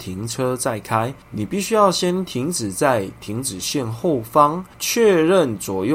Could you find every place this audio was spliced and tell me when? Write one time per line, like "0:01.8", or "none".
none